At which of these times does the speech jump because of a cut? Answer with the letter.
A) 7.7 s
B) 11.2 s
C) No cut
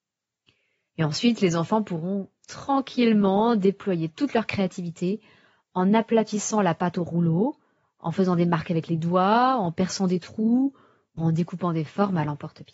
B